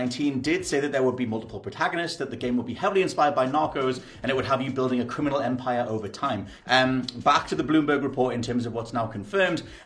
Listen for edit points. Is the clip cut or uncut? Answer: cut